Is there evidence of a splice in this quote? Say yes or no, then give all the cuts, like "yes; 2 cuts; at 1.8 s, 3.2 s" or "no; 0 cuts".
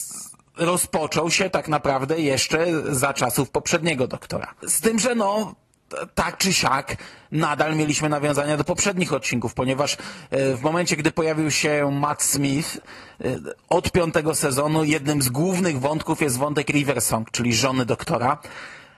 yes; 1 cut; at 4.6 s